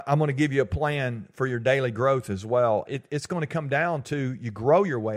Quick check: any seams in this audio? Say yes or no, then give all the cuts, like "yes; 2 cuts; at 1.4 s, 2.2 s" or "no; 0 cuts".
yes; 1 cut; at 2.9 s